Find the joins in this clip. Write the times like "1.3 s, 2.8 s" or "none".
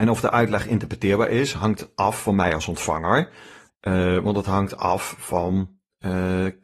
3.7 s

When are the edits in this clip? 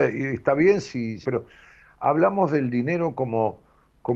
1.2 s

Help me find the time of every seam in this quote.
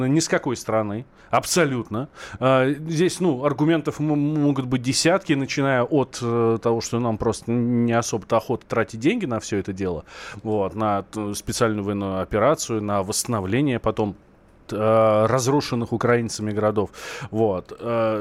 14.7 s

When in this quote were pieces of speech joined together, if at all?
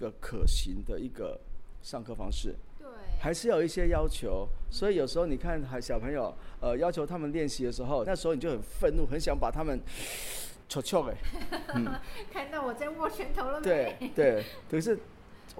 8.1 s

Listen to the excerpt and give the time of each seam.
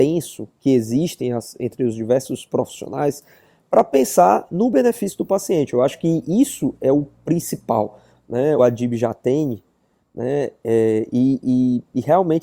8.6 s

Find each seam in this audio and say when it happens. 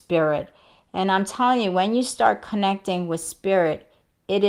none

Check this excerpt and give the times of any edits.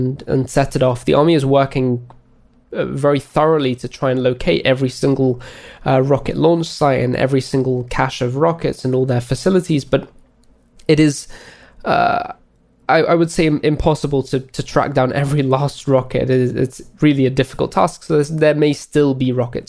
none

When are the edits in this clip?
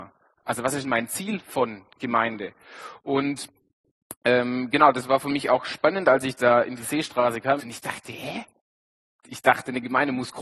7.6 s

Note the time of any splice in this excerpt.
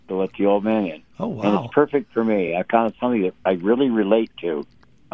none

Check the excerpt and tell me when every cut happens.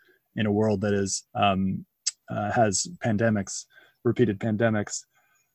1.3 s

